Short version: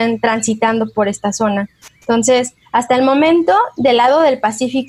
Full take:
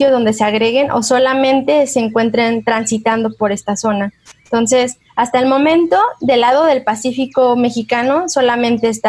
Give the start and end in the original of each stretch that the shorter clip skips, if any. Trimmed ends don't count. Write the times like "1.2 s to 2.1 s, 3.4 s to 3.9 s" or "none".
none